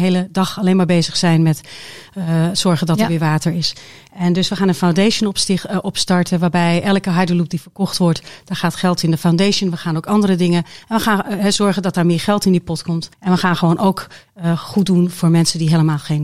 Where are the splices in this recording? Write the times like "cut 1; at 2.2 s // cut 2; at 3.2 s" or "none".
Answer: cut 1; at 13.1 s